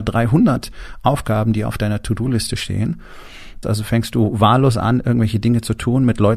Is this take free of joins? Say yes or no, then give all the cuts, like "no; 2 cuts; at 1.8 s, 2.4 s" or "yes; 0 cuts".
no; 1 cut; at 3.6 s